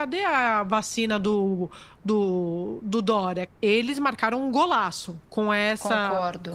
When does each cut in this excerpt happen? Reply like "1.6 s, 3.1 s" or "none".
3.5 s